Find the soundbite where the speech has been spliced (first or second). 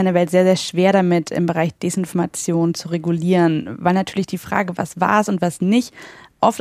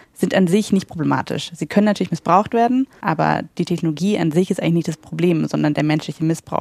second